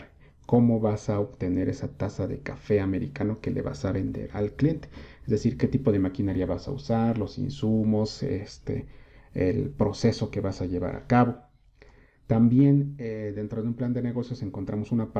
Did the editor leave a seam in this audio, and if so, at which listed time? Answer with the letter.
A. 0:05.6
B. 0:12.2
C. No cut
C